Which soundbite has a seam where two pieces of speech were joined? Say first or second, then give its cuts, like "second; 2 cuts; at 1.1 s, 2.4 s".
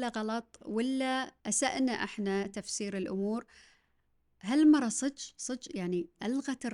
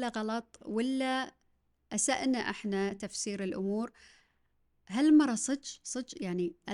first; 1 cut; at 1.4 s